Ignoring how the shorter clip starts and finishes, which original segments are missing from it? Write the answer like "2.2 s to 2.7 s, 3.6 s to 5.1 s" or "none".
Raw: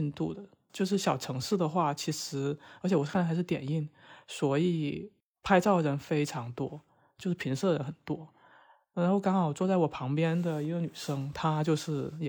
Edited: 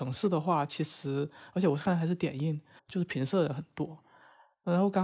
4.1 s to 7.1 s